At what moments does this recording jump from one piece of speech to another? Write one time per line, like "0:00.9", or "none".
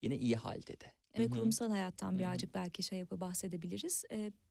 0:01.2